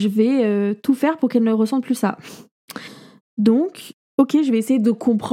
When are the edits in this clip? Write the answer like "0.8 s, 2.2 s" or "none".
3.2 s